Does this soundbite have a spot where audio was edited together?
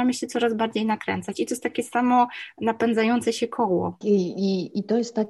yes; 1 cut; at 4.0 s

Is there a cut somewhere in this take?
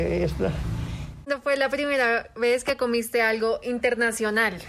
yes; 1 cut; at 1.2 s

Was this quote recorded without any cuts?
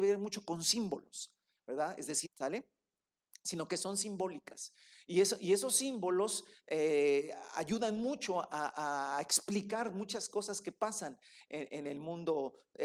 no; 1 cut; at 2.2 s

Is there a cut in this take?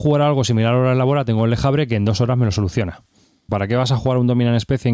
yes; 1 cut; at 3.5 s

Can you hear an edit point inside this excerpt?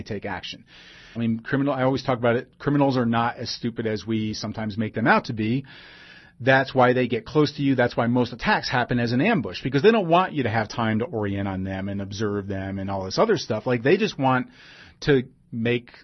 yes; 1 cut; at 1.2 s

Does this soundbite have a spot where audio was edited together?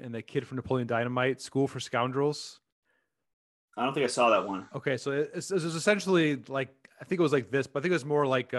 no; 0 cuts

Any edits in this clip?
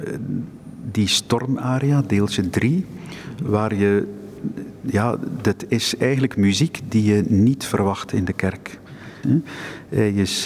yes; 1 cut; at 9.2 s

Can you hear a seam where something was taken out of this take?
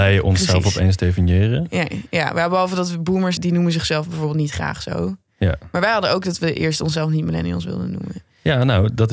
yes; 1 cut; at 3.4 s

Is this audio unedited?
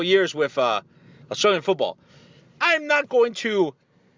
no; 1 cut; at 2.6 s

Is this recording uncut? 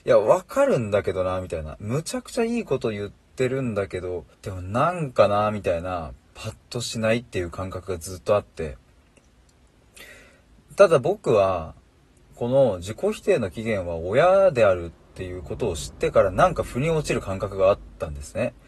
no; 1 cut; at 4.3 s

